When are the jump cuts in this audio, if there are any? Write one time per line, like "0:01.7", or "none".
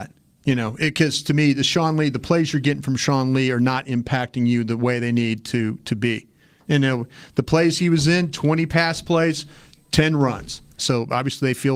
0:06.6
0:10.8

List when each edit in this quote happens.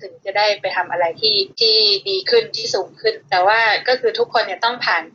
0:01.5
0:03.2

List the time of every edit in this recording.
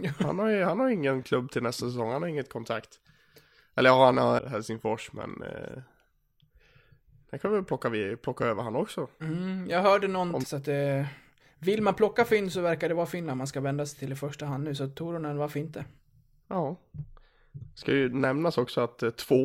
0:04.4
0:10.4

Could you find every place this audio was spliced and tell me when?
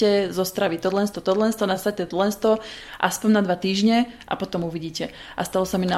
none

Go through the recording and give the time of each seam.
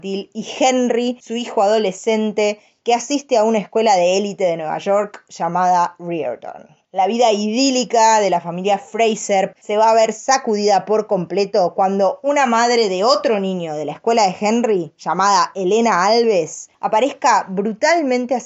0:09.5

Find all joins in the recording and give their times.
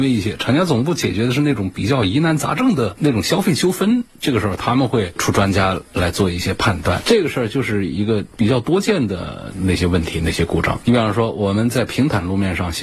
0:10.8

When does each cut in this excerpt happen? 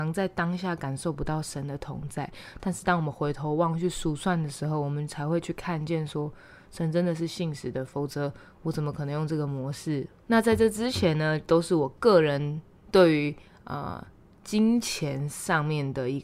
0:10.3

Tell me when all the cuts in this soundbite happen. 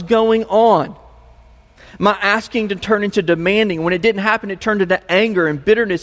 none

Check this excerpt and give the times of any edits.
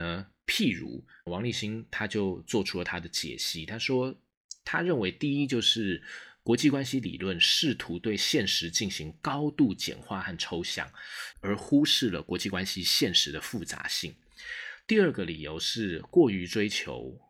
0:01.3
0:11.3

